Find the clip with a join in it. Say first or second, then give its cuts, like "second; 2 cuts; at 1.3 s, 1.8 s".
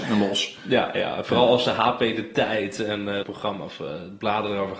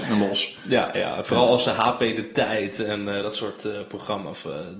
first; 1 cut; at 3.2 s